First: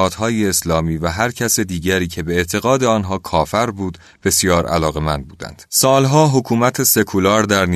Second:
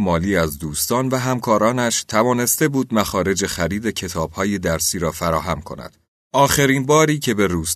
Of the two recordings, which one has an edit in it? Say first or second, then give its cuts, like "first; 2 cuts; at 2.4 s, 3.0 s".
first; 1 cut; at 5.7 s